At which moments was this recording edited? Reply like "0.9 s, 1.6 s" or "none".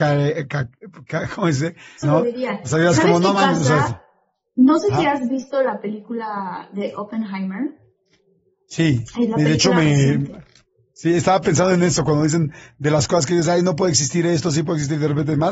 2.0 s